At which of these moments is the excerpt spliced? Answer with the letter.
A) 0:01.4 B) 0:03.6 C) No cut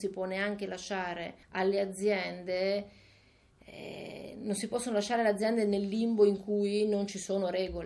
A